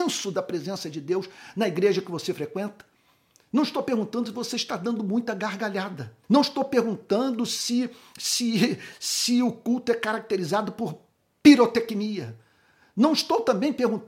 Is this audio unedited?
no; 1 cut; at 6.2 s

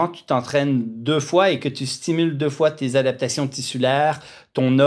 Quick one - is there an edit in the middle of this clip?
no; 0 cuts

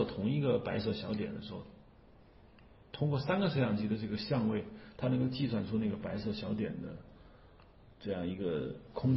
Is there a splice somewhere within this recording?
no; 0 cuts

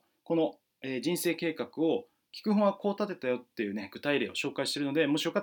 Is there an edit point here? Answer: no; 0 cuts

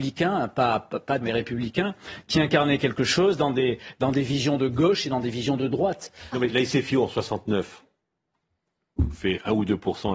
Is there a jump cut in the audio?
yes; 2 cuts; at 1.2 s, 6.3 s

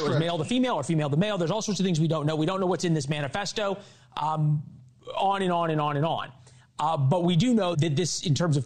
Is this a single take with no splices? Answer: no; 1 cut; at 7.7 s

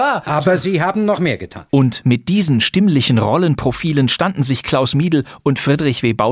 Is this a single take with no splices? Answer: no; 1 cut; at 1.7 s

